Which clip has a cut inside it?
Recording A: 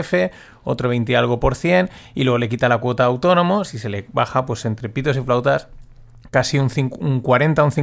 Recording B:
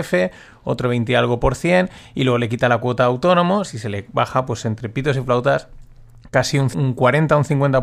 B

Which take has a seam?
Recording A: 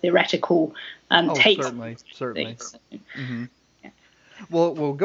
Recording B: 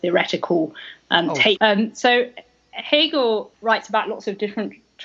B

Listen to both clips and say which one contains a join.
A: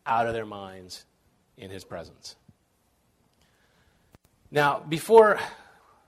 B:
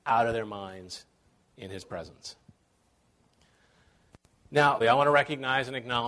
B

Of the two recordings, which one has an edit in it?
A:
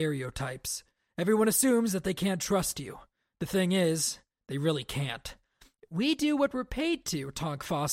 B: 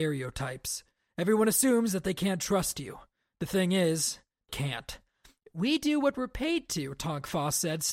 B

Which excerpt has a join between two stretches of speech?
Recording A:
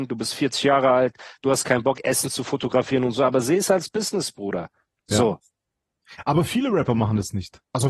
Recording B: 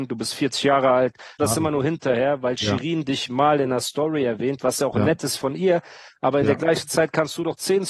B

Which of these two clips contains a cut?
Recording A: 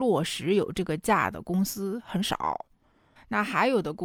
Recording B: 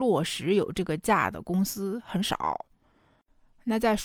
A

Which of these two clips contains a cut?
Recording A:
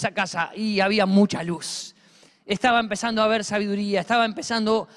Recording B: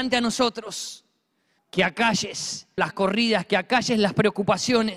B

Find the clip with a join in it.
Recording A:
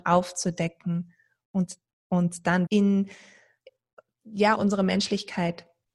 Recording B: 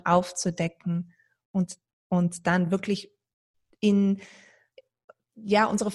A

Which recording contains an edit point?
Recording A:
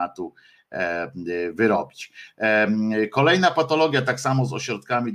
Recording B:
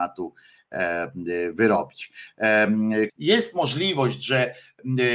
B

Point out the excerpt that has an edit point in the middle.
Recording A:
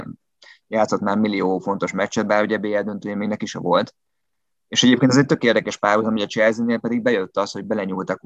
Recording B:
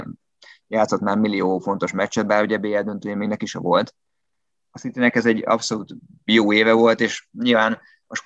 B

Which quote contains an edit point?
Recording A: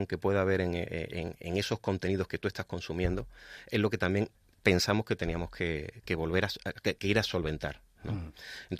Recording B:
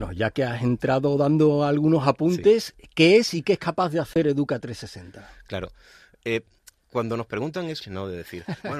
B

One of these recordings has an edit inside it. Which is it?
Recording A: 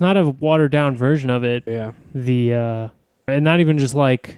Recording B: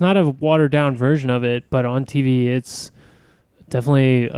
A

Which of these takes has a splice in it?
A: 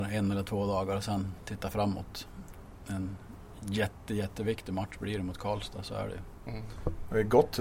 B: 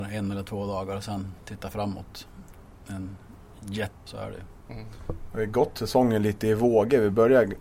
B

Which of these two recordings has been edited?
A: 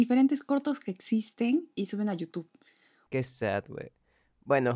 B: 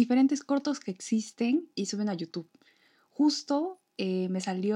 A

